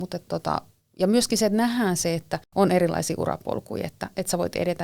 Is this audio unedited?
yes; 0 cuts

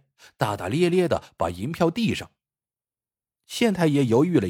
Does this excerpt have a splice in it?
no; 0 cuts

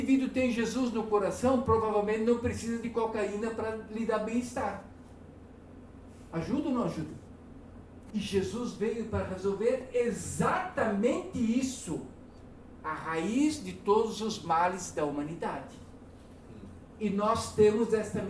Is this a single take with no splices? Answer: no; 1 cut; at 8.1 s

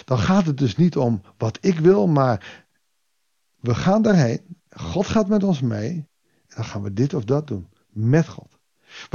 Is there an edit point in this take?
no; 0 cuts

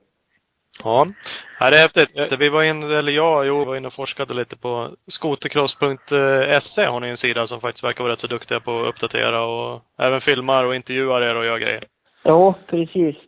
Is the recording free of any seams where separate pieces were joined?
no; 2 cuts; at 2.3 s, 3.6 s

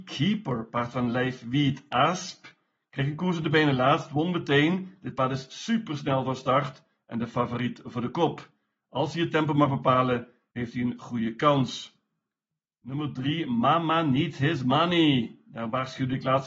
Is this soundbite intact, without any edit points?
yes; 0 cuts

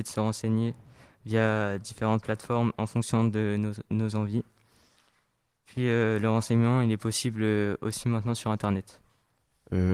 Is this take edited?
no; 0 cuts

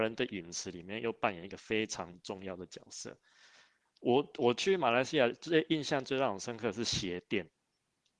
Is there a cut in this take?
yes; 1 cut; at 3.9 s

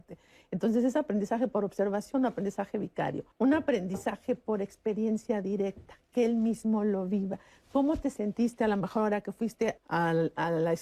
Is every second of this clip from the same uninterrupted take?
no; 2 cuts; at 3.3 s, 9.8 s

